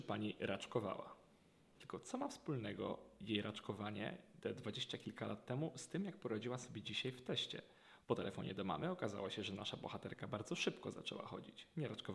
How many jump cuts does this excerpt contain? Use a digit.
2